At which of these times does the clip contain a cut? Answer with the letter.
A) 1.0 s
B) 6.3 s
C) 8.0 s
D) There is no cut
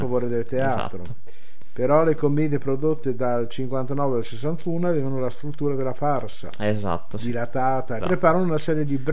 C